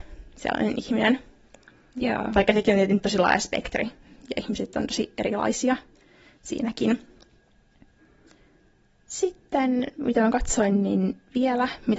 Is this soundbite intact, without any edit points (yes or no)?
yes